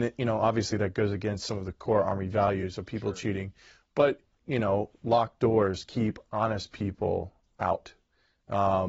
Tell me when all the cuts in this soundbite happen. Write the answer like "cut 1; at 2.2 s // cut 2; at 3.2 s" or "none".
none

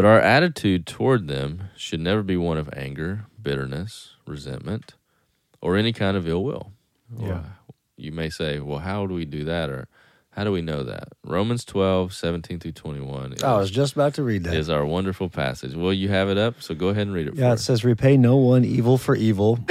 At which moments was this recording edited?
cut 1; at 7.0 s

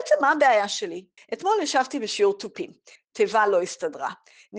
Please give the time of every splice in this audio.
cut 1; at 1.2 s // cut 2; at 3.0 s

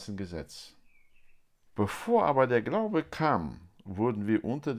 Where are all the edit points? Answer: cut 1; at 1.7 s

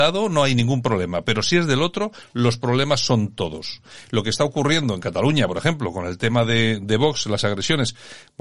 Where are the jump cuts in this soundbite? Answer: none

